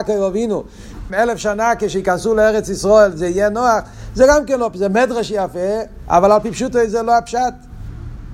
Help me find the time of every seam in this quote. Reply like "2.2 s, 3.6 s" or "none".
1.1 s